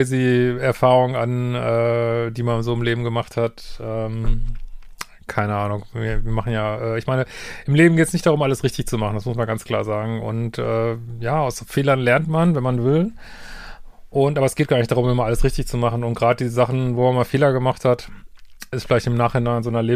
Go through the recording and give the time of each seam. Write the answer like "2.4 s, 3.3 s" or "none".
18.7 s